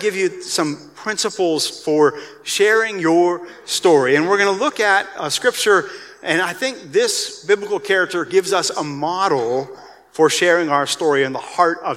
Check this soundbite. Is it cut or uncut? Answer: cut